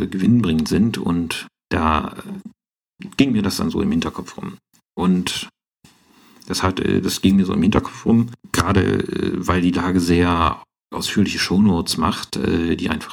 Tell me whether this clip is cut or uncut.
cut